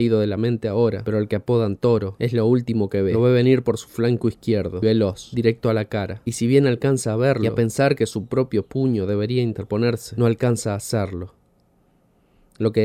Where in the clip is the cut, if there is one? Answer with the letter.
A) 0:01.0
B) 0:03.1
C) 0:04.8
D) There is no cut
C